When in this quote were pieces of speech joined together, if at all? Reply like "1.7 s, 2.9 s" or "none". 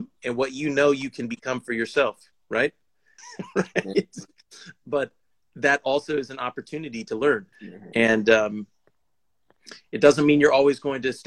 3.2 s, 7.5 s